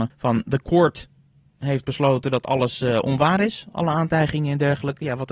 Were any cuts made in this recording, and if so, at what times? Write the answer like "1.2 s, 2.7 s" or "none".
none